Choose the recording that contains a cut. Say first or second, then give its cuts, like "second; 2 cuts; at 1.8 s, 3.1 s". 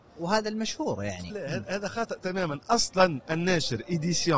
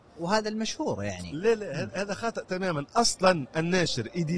first; 1 cut; at 1.3 s